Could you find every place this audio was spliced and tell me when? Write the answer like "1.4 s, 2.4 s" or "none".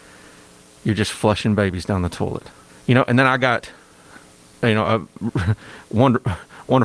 2.7 s